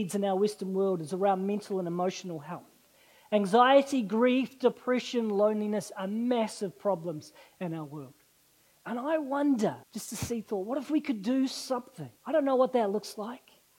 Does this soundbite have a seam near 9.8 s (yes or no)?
yes